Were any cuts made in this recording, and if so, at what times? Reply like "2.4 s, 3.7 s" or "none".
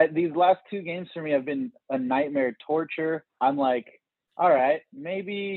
3.3 s